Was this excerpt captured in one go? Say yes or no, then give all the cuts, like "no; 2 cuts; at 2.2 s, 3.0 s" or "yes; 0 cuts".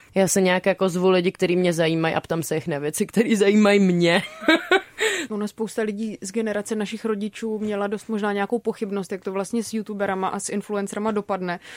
yes; 0 cuts